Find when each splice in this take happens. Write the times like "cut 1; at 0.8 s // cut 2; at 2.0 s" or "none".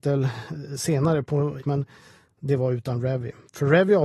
cut 1; at 1.6 s